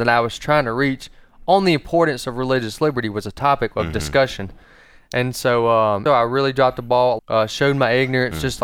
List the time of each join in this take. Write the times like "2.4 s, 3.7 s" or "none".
6.1 s, 7.2 s